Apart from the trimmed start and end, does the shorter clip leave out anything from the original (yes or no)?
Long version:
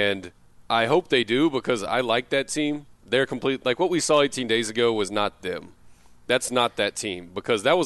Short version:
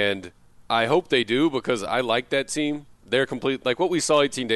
no